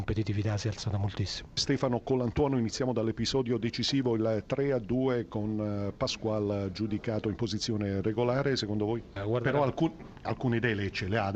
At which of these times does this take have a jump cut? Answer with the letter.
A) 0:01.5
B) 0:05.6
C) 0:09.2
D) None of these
C